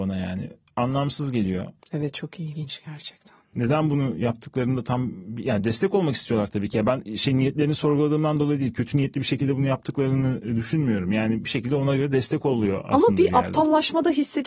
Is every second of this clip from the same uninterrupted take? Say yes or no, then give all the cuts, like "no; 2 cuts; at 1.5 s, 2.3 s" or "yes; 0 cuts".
yes; 0 cuts